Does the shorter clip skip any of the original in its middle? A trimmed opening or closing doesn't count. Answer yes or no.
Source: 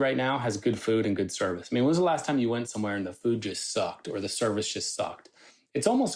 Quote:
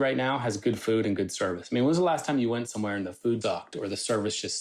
yes